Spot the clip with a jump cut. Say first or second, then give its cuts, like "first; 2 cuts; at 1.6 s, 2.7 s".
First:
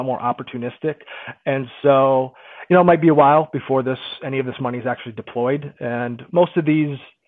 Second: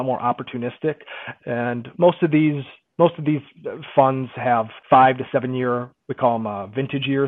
second; 3 cuts; at 1.4 s, 2.9 s, 4.8 s